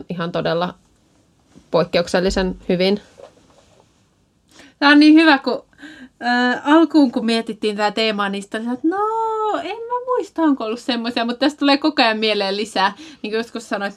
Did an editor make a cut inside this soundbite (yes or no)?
no